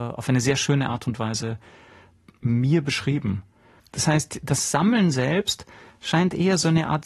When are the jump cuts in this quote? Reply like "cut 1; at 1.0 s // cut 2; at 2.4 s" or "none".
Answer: cut 1; at 3.8 s